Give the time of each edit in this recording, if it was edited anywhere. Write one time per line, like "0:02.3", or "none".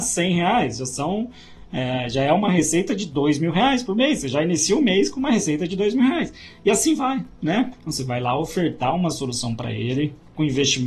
0:07.7